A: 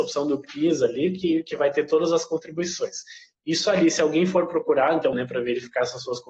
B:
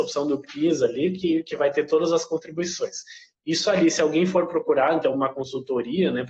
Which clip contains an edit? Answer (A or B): A